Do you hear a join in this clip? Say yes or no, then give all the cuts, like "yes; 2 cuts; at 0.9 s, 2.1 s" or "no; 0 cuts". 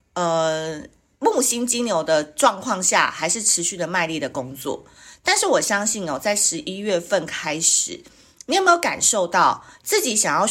no; 0 cuts